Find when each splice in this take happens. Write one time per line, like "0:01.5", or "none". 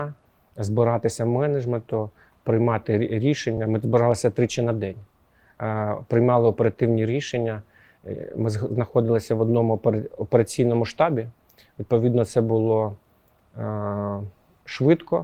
none